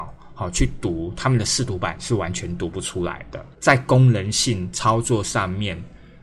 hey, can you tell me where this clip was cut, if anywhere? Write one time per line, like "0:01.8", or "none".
0:03.5